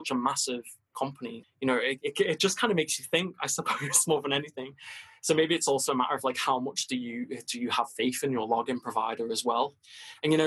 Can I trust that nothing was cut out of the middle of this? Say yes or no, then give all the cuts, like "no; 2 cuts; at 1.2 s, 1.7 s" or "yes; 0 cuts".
no; 1 cut; at 1.4 s